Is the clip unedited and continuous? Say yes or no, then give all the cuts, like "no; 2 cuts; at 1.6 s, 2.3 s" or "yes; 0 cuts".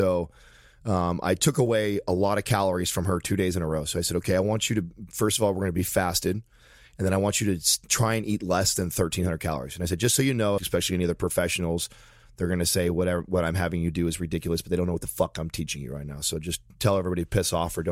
no; 1 cut; at 10.6 s